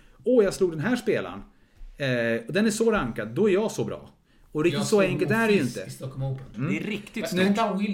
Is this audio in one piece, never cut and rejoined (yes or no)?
no